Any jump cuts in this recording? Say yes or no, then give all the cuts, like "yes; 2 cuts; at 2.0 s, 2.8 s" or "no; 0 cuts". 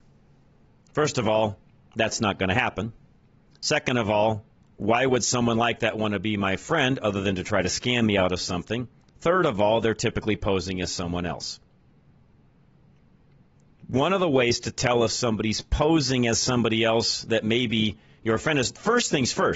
no; 0 cuts